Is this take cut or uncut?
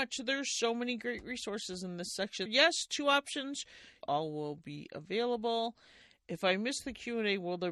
cut